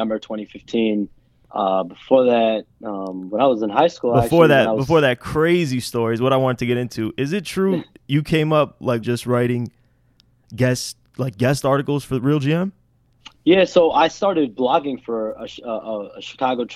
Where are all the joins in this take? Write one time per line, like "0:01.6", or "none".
0:09.0